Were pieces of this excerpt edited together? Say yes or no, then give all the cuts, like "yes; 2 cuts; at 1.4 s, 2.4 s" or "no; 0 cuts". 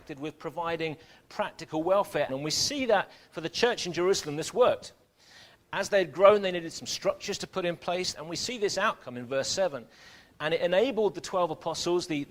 yes; 3 cuts; at 2.3 s, 8.1 s, 10.3 s